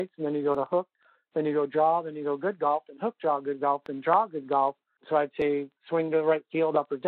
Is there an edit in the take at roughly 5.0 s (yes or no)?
yes